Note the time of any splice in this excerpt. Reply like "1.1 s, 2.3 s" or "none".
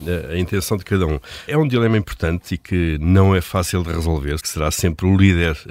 1.5 s, 4.4 s